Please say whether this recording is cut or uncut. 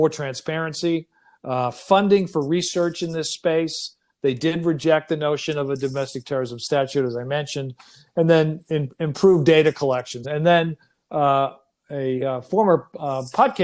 cut